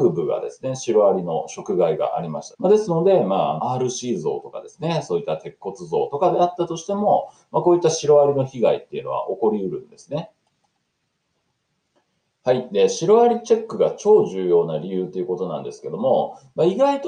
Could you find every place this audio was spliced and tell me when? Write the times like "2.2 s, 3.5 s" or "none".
2.5 s, 3.6 s